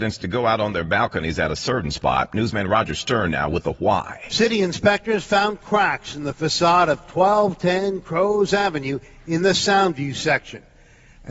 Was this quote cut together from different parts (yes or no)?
no